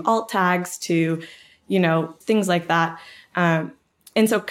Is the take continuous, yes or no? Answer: no